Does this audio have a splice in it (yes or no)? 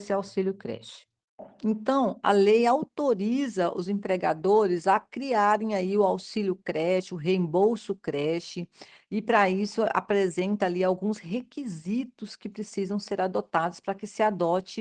no